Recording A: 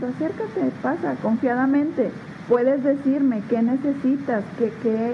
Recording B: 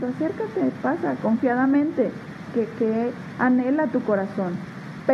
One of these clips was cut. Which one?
B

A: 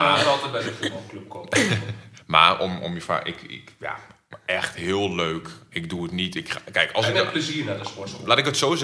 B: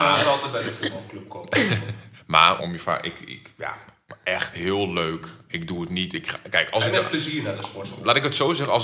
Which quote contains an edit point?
B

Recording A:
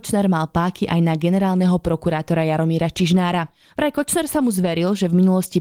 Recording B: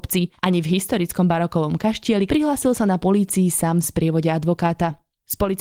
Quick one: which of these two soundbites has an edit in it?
B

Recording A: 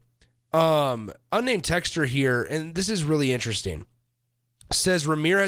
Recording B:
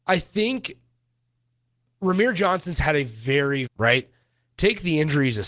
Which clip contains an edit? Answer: B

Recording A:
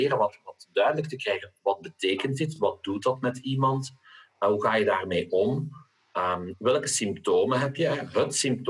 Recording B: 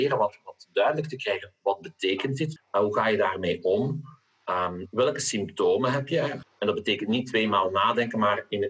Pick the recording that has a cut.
B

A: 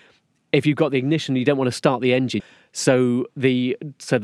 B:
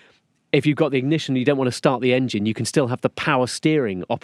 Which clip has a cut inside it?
A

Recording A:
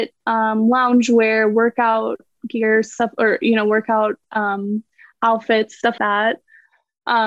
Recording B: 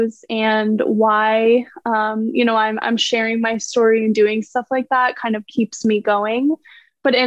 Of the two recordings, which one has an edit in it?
A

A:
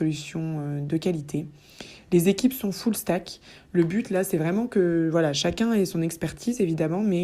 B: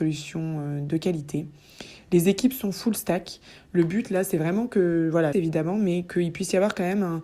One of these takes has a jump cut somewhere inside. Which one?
B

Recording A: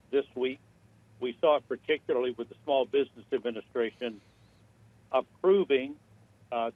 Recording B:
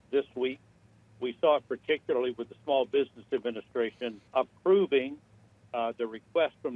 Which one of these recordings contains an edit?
B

